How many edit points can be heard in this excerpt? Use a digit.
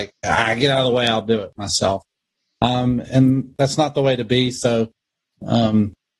0